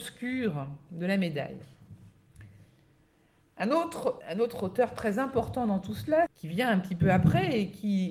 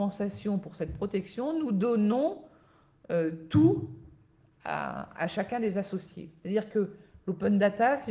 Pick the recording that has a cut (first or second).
first